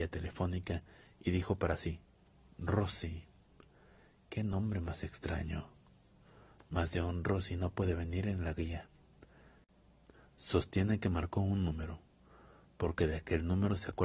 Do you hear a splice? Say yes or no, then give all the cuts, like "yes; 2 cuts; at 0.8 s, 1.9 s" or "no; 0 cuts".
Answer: no; 0 cuts